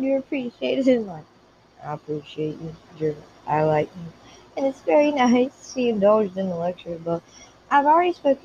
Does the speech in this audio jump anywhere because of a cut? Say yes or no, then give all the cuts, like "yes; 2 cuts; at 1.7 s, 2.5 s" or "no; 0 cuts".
no; 0 cuts